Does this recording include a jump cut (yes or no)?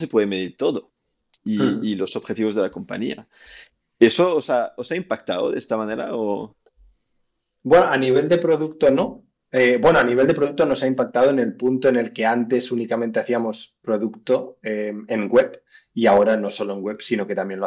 no